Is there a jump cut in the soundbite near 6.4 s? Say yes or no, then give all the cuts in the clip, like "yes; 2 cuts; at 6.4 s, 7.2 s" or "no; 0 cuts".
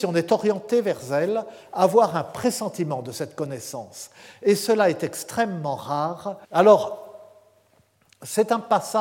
yes; 1 cut; at 6.4 s